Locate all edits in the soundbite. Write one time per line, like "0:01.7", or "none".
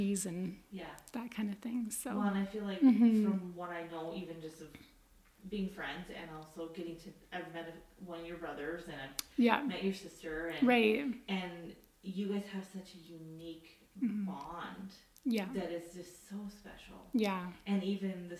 none